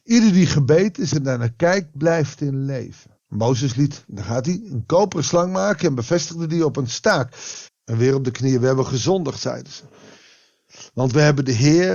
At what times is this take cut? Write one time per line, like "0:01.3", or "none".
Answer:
0:03.2
0:07.7